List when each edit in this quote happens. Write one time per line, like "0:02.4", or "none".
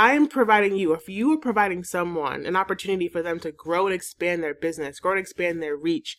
none